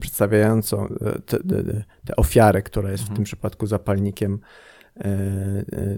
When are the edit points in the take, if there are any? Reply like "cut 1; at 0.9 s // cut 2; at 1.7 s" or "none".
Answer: none